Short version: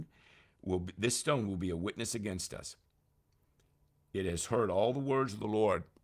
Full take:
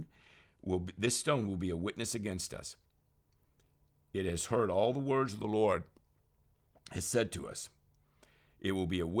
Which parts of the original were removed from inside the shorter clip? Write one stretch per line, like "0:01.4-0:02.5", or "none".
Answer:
none